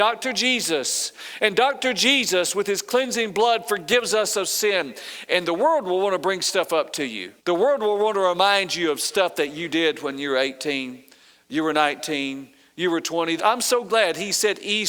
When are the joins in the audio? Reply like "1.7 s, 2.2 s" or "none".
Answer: 7.4 s, 13.4 s